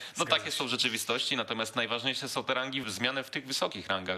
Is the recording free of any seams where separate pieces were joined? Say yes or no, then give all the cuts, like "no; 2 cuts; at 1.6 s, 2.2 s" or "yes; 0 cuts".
no; 1 cut; at 2.8 s